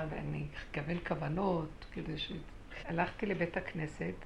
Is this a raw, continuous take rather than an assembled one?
no; 1 cut; at 2.8 s

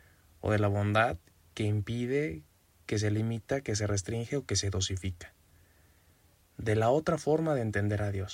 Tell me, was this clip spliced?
yes; 1 cut; at 6.4 s

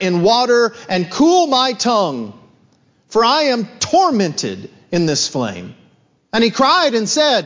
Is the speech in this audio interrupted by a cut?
yes; 1 cut; at 6.2 s

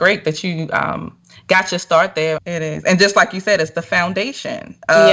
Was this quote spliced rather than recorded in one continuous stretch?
yes; 1 cut; at 2.4 s

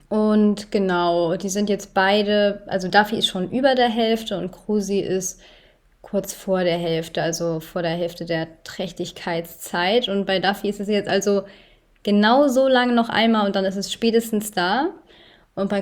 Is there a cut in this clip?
no; 0 cuts

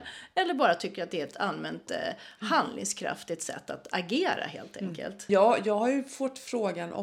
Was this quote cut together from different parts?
yes; 1 cut; at 5.3 s

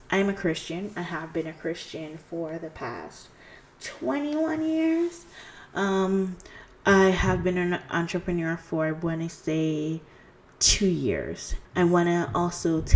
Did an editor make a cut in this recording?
yes; 1 cut; at 11.6 s

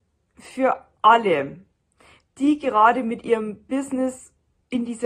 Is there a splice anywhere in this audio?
no; 0 cuts

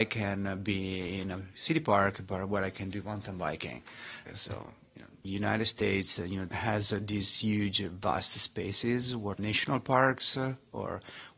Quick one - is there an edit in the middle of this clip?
yes; 2 cuts; at 4.3 s, 9.3 s

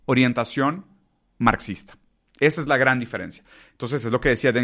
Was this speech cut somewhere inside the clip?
no; 0 cuts

